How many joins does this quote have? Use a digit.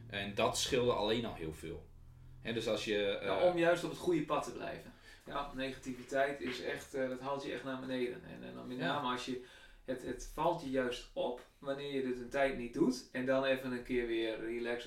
1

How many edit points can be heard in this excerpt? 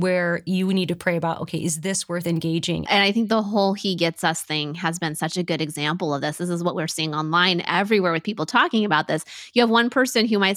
1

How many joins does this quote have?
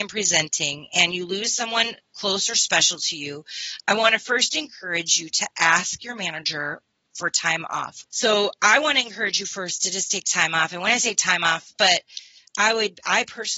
2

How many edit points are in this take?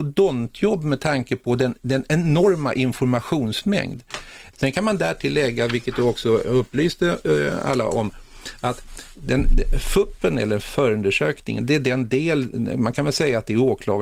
1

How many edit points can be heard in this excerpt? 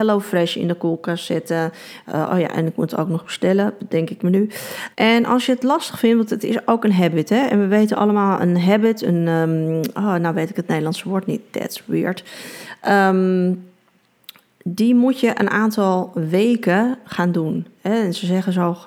1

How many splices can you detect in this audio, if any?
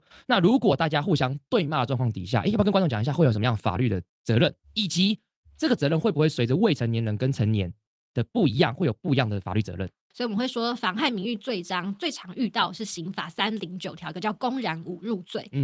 1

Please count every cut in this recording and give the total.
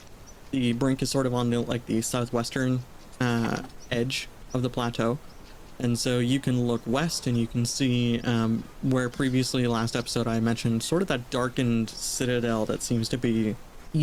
0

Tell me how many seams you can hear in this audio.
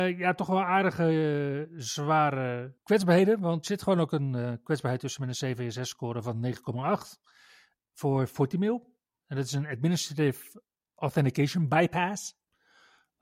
1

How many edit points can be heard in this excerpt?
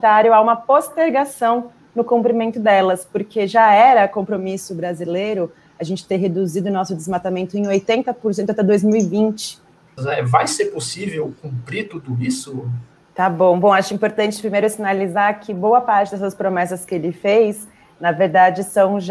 2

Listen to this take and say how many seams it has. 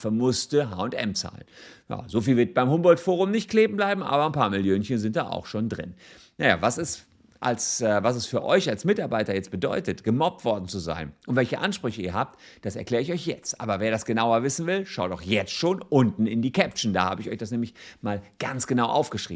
0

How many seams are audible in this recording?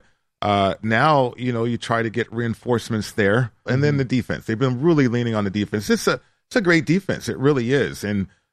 1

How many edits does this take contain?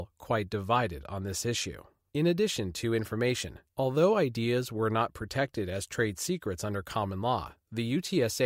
2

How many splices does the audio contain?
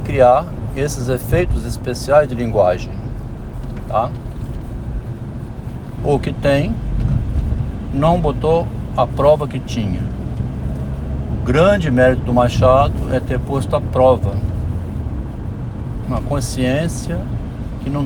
2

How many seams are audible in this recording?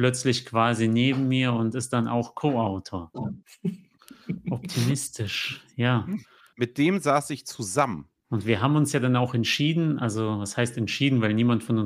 3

